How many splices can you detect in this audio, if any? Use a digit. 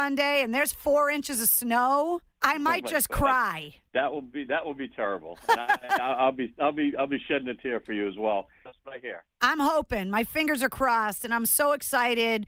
1